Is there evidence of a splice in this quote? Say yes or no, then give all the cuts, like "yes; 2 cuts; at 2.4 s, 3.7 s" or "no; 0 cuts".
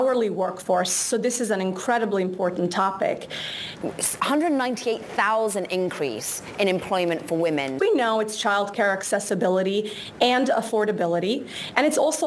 yes; 2 cuts; at 3.8 s, 7.8 s